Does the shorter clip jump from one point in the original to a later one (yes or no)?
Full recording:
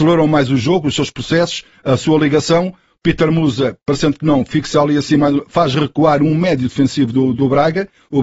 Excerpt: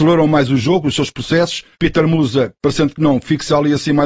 yes